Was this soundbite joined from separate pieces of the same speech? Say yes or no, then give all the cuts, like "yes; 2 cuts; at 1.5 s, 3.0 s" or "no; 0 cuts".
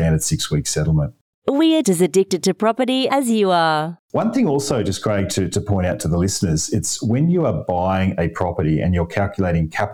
yes; 2 cuts; at 1.8 s, 4.0 s